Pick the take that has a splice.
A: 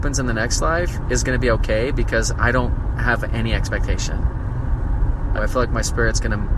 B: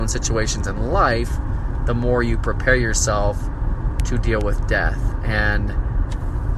A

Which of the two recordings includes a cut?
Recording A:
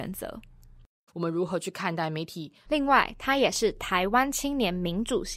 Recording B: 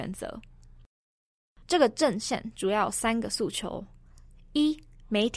A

